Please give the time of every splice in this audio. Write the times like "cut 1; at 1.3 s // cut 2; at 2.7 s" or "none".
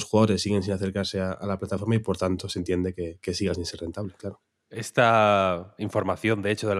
none

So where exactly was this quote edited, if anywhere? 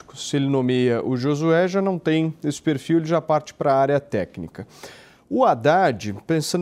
none

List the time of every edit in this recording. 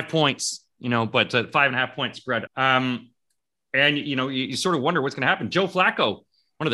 cut 1; at 2.5 s

